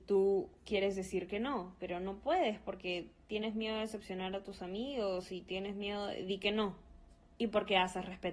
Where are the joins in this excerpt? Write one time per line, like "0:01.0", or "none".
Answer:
0:07.4